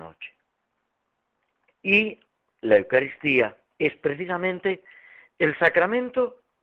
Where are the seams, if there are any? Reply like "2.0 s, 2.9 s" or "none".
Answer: 1.7 s, 3.7 s